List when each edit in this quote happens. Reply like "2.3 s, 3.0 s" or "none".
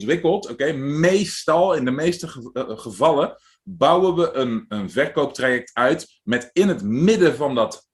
none

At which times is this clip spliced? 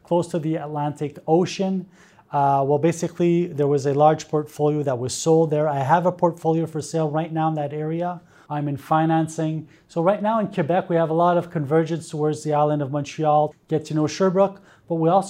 8.5 s, 13.5 s

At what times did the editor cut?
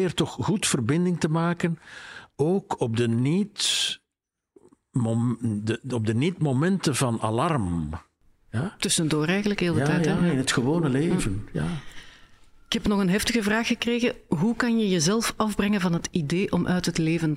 none

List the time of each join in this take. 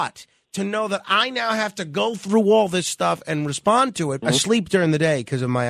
4.2 s

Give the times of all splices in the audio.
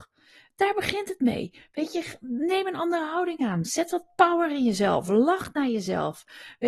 none

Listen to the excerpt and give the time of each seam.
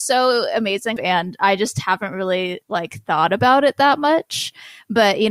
1.0 s, 2.6 s

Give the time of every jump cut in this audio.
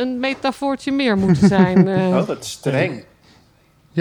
none

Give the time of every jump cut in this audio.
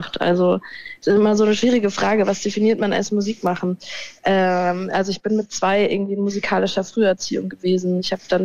none

